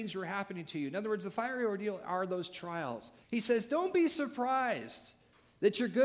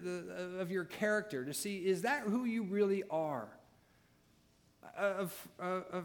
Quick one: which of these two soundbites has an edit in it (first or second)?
first